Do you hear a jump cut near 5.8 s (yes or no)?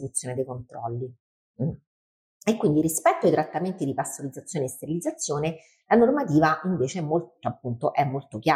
no